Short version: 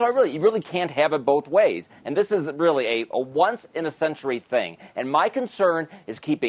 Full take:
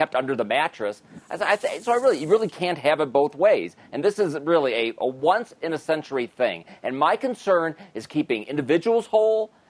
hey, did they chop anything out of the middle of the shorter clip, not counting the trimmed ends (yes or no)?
no